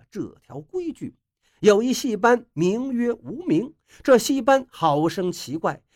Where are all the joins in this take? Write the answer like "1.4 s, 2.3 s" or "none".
1.5 s